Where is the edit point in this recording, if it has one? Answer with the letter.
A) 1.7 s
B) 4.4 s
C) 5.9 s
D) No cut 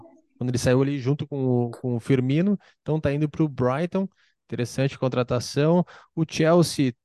D